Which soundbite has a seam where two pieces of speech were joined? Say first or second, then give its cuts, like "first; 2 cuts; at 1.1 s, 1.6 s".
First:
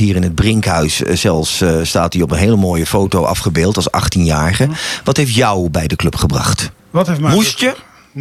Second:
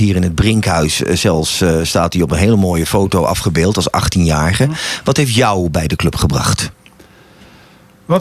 first; 1 cut; at 6.8 s